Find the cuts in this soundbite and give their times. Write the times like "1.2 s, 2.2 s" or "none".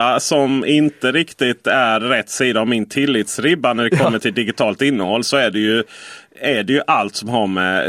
none